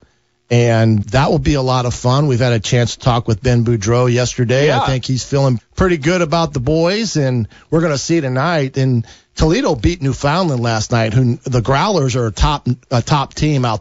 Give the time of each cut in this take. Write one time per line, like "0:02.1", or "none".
0:01.0
0:05.6